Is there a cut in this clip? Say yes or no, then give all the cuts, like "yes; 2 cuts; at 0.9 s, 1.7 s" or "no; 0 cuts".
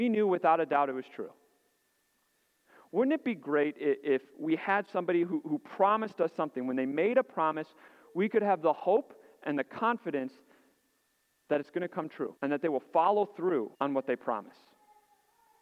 yes; 2 cuts; at 12.4 s, 13.7 s